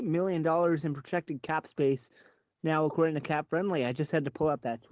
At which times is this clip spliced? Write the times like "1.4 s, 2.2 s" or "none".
none